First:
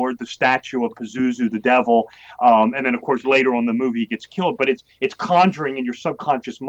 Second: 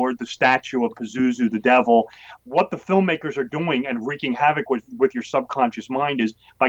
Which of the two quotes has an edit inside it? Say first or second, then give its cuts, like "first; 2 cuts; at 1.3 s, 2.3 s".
second; 1 cut; at 2.4 s